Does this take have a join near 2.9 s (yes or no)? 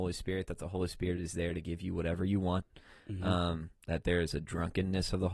no